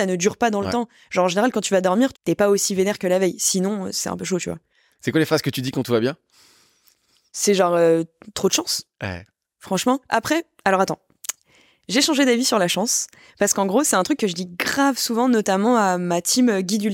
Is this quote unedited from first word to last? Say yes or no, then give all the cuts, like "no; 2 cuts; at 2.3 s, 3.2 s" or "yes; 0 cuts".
no; 1 cut; at 2.1 s